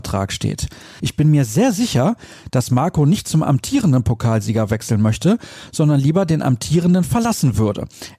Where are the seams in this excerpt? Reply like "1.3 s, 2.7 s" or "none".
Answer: 1.0 s